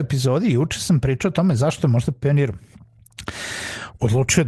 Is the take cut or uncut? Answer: uncut